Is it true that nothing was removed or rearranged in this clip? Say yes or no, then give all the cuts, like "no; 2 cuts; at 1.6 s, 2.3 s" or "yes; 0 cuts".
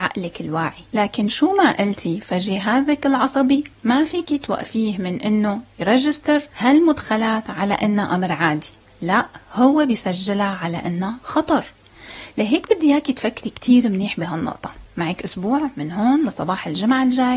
yes; 0 cuts